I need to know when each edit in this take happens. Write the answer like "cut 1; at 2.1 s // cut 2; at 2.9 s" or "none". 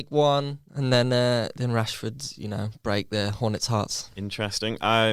none